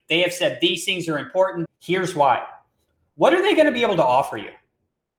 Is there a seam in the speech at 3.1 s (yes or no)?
no